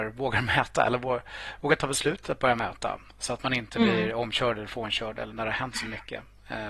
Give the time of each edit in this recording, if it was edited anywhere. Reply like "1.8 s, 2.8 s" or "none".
5.3 s